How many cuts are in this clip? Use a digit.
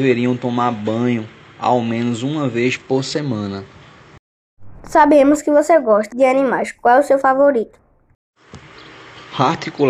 1